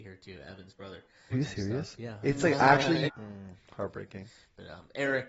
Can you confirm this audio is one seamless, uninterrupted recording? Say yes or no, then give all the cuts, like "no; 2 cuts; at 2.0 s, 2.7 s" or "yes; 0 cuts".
no; 2 cuts; at 1.3 s, 3.1 s